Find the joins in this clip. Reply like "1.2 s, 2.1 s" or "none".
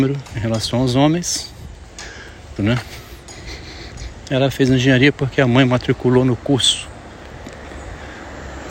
2.6 s